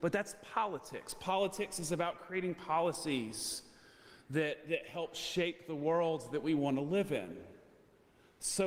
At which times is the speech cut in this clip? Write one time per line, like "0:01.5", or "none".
none